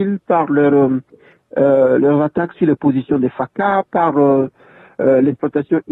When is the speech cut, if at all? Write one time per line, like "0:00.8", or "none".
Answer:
none